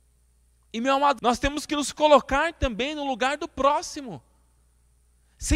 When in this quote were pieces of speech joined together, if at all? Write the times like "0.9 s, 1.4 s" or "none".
1.2 s